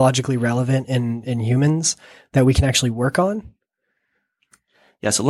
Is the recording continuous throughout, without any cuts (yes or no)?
yes